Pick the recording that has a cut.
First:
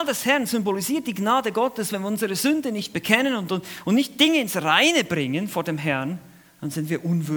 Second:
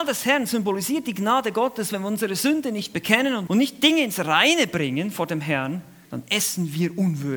second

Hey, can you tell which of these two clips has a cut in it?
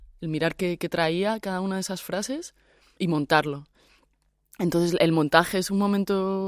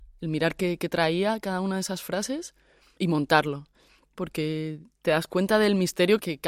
second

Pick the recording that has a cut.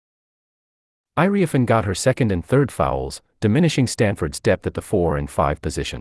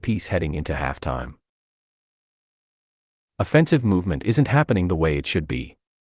first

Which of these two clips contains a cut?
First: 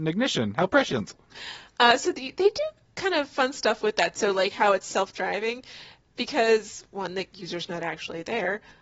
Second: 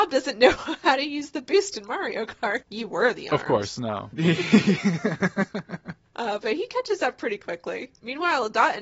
second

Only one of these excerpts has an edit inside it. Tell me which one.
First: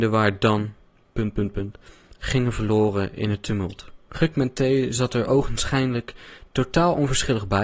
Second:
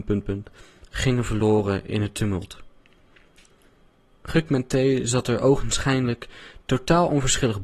first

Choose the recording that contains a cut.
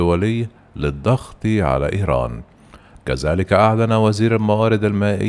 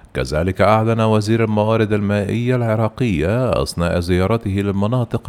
first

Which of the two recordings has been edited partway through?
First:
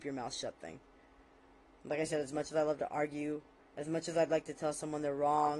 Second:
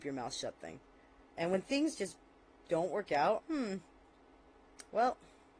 second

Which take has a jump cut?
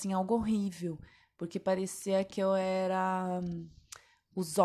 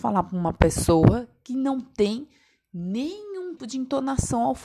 second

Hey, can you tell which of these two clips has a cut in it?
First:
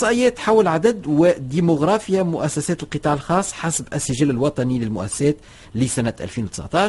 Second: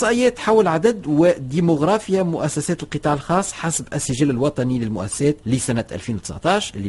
second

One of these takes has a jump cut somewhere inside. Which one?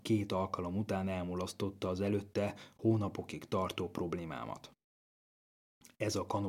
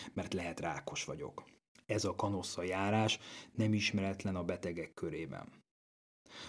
second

